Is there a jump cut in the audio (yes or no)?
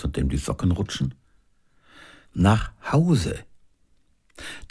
yes